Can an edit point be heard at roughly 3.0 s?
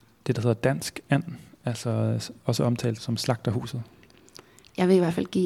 yes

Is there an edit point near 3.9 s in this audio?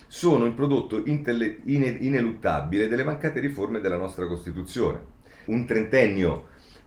no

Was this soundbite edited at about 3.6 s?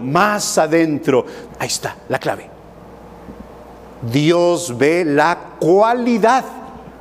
no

